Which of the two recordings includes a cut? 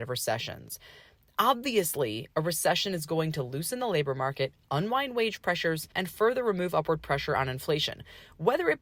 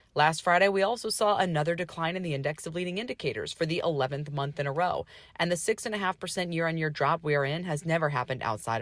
first; 1 cut; at 5.9 s

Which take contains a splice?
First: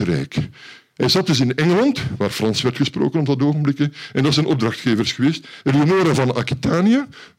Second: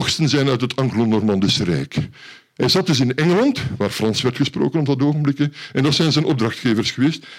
first; 2 cuts; at 4.4 s, 5.6 s

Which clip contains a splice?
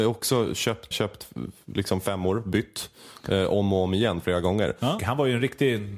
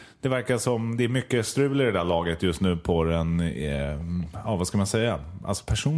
first; 2 cuts; at 0.9 s, 5.0 s

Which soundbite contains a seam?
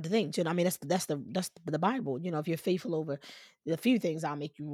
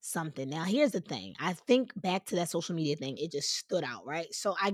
second; 1 cut; at 3.2 s

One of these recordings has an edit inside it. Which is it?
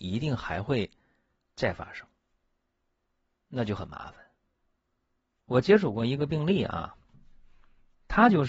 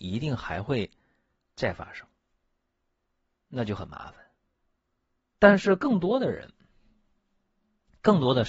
second; 1 cut; at 5.3 s

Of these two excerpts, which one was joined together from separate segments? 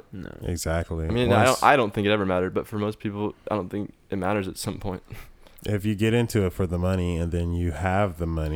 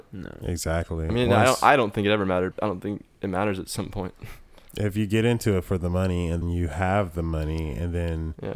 second; 2 cuts; at 2.5 s, 6.4 s

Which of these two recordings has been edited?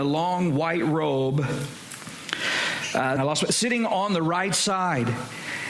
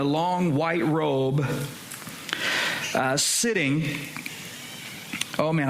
first; 1 cut; at 3.2 s

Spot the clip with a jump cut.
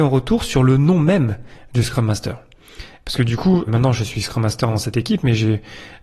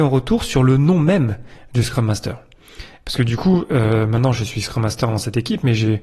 first; 1 cut; at 3.7 s

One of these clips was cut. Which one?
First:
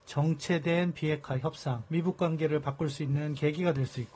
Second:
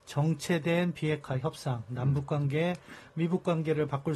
first; 1 cut; at 1.9 s

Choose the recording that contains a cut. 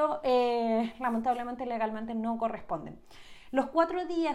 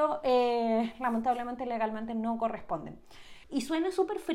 second; 1 cut; at 3.4 s

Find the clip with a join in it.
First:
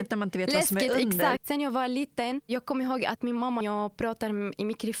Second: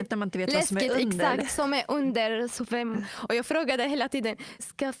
first; 2 cuts; at 1.4 s, 3.6 s

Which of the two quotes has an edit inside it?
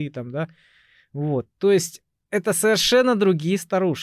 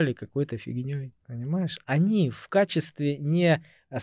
second; 1 cut; at 1.2 s

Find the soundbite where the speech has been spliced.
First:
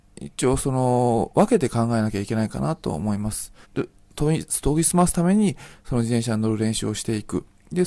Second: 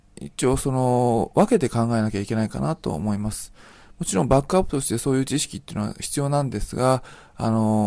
first; 1 cut; at 3.6 s

